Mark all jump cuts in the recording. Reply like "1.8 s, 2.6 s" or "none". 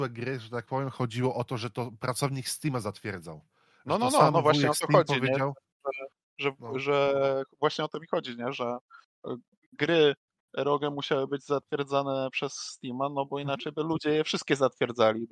none